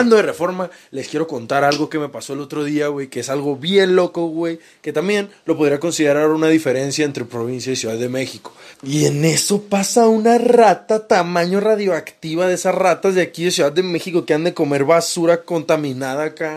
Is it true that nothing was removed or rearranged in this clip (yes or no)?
no